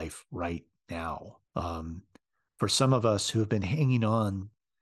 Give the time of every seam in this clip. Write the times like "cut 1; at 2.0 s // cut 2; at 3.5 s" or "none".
cut 1; at 1.5 s